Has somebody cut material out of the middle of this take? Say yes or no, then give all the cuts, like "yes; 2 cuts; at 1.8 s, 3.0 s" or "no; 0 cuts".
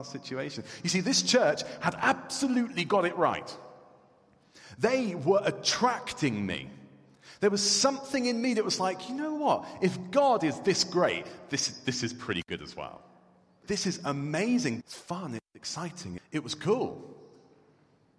yes; 3 cuts; at 13.6 s, 14.8 s, 16.2 s